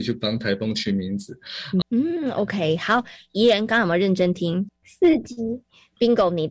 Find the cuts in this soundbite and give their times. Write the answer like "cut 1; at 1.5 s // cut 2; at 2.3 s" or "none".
cut 1; at 1.8 s // cut 2; at 4.7 s